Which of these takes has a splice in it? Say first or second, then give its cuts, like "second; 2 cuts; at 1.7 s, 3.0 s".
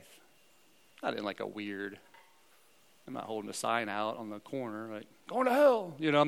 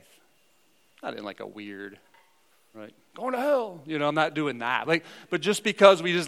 second; 1 cut; at 2.7 s